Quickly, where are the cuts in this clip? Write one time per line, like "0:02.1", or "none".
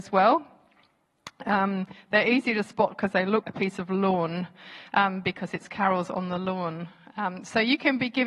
0:03.4